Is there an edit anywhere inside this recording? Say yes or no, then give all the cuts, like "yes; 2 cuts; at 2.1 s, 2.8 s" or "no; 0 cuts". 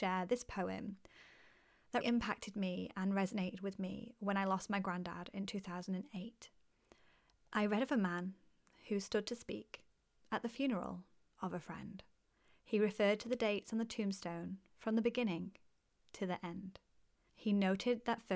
yes; 2 cuts; at 2.0 s, 7.5 s